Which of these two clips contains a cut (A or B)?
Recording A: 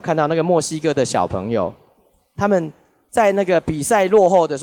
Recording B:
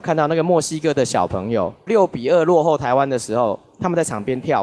B